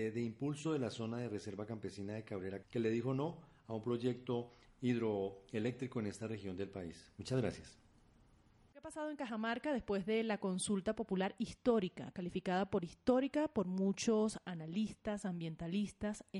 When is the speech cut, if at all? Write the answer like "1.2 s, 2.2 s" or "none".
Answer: 2.6 s, 8.7 s